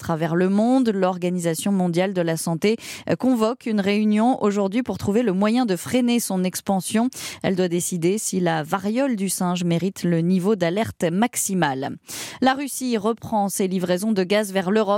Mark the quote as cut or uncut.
uncut